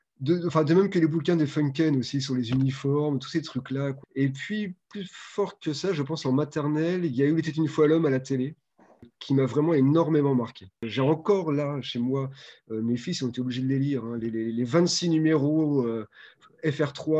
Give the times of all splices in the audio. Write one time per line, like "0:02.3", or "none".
0:04.0